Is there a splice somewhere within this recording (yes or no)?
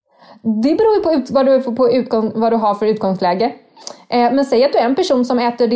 no